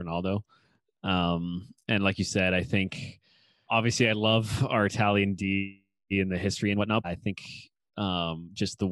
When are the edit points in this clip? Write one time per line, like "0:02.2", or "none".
0:03.7
0:07.0